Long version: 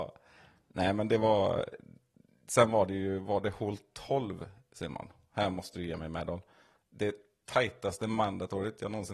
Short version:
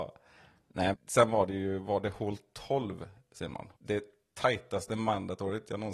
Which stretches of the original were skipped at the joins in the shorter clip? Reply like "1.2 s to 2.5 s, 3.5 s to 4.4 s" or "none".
0.9 s to 2.3 s, 5.2 s to 6.9 s